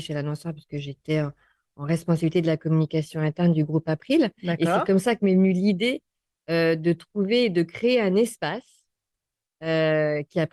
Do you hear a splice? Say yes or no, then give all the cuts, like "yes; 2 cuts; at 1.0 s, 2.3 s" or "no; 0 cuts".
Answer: no; 0 cuts